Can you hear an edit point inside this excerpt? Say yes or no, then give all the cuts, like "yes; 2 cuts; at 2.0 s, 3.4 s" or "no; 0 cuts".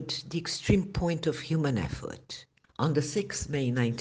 yes; 1 cut; at 2.6 s